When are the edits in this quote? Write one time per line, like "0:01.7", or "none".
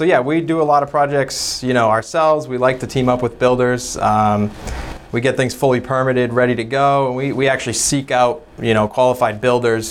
none